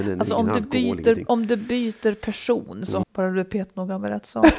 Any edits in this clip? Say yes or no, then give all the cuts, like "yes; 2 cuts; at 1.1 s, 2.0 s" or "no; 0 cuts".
yes; 1 cut; at 3.0 s